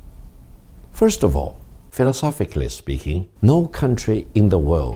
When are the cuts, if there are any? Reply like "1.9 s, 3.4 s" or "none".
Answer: 3.4 s